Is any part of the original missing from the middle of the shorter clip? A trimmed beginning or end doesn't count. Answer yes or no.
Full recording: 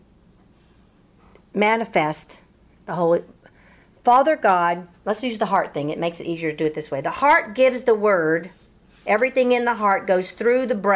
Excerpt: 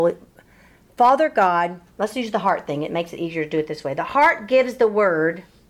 no